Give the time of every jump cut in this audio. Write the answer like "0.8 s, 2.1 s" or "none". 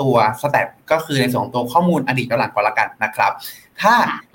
none